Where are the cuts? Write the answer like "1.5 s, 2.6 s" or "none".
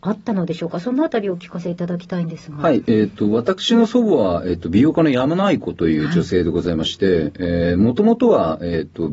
none